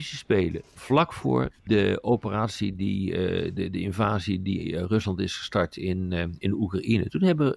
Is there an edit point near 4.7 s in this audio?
no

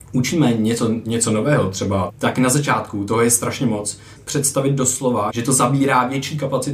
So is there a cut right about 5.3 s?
yes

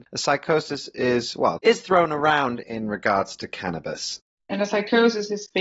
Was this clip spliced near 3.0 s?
no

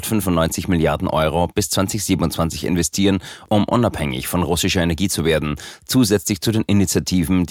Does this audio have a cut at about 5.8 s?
no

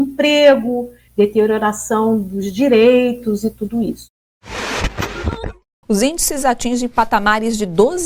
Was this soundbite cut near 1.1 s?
yes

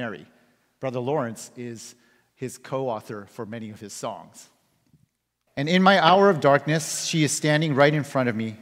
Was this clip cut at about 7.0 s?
no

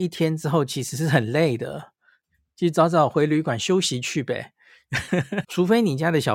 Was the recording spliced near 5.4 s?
yes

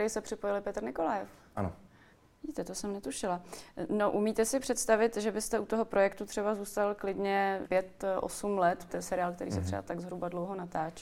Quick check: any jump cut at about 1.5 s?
no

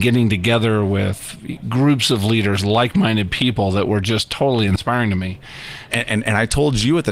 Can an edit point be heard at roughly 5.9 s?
yes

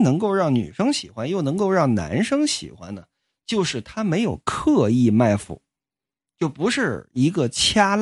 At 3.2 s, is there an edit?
no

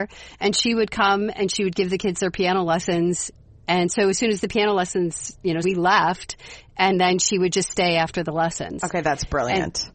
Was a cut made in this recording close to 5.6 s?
yes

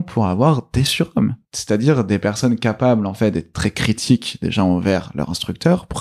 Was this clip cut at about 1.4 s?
yes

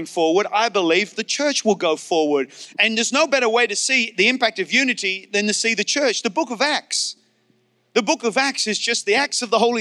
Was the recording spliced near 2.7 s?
yes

